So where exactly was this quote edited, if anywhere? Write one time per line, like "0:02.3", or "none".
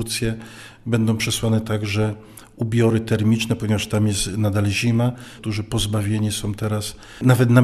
0:05.4